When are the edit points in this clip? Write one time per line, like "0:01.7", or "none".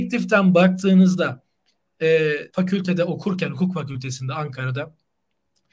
0:02.5